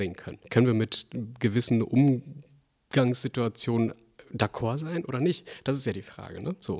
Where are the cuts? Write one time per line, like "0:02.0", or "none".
none